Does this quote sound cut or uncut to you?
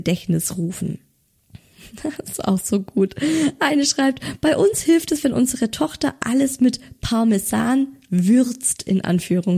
uncut